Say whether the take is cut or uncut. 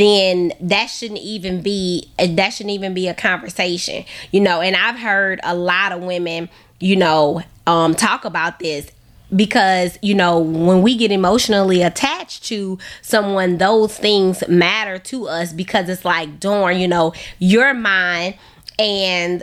uncut